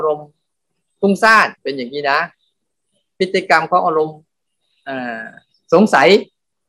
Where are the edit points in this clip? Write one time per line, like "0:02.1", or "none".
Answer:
0:01.6

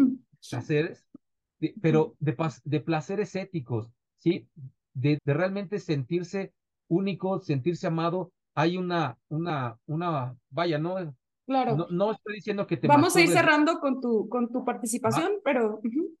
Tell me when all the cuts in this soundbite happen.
0:05.2

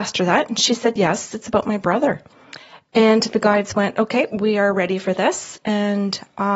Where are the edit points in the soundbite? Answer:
none

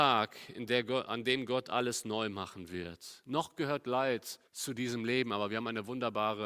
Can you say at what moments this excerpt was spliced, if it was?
0:04.5

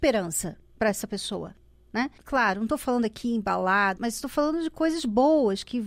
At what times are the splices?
0:02.2
0:04.0

